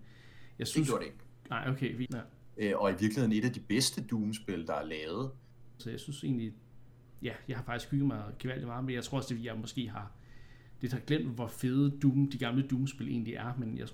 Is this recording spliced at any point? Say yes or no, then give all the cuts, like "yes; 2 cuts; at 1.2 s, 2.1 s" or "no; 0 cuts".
yes; 2 cuts; at 2.1 s, 5.8 s